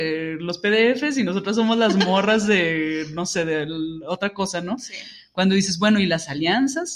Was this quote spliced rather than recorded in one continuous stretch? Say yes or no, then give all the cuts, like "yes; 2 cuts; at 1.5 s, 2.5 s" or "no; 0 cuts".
no; 0 cuts